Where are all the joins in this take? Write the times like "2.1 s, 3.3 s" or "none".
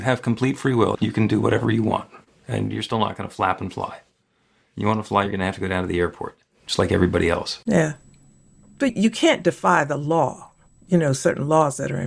none